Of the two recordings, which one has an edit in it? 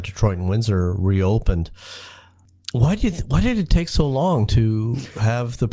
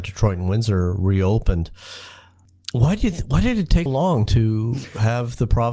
second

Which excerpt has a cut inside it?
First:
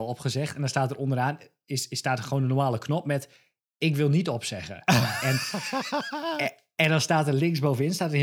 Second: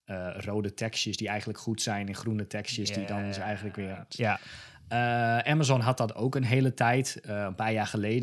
second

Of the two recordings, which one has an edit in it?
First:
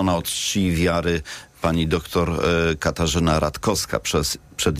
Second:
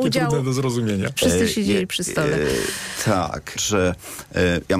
second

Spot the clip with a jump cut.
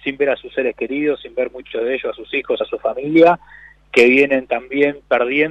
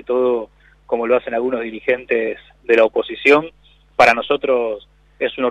first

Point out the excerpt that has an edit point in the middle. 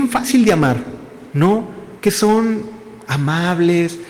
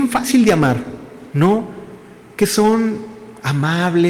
first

